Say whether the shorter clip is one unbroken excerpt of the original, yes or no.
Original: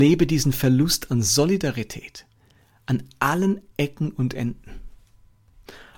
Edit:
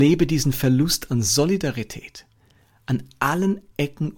yes